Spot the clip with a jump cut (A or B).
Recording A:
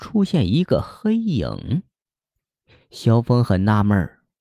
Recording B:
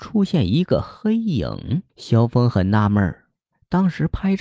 B